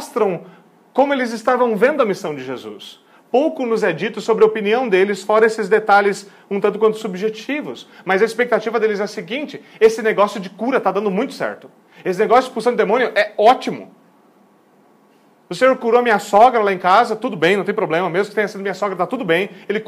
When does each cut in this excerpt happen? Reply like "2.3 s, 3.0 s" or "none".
none